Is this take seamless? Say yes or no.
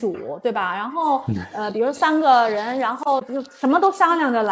yes